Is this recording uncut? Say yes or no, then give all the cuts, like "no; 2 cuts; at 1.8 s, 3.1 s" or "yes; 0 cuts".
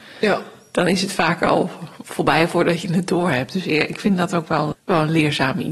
no; 1 cut; at 4.7 s